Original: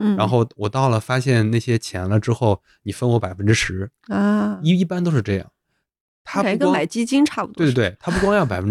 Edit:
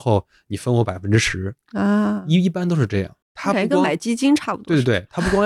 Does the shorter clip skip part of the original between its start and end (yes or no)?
yes